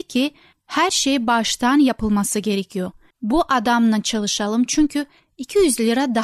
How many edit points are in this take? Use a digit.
1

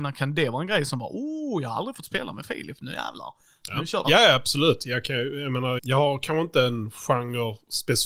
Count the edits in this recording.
2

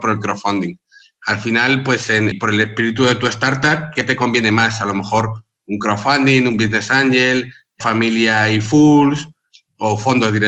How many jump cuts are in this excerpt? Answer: 2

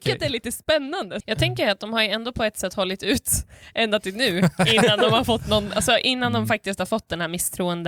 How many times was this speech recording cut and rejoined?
1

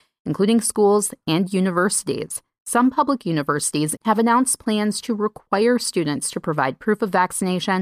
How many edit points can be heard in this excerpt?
1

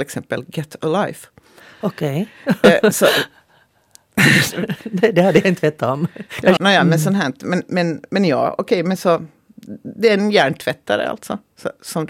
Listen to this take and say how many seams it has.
1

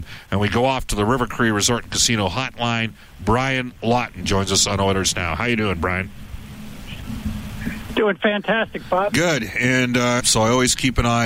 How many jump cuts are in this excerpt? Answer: 2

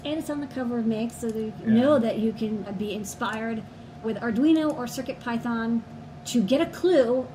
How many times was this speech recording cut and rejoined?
2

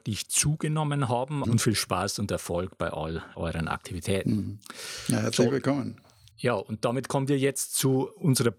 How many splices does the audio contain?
1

